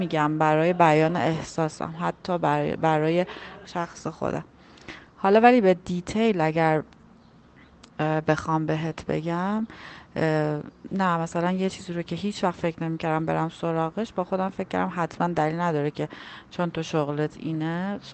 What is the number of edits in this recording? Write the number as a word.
one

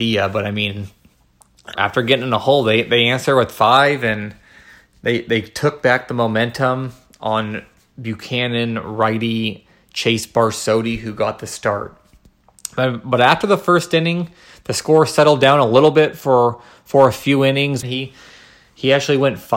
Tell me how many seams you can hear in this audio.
two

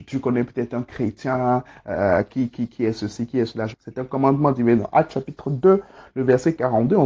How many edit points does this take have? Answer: one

